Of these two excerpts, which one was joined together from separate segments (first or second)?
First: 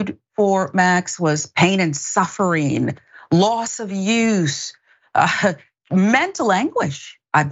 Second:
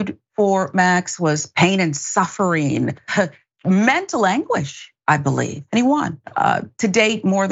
second